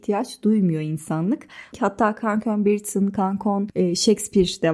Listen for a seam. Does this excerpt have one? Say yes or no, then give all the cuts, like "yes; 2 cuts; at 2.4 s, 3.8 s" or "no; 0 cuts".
yes; 1 cut; at 1.7 s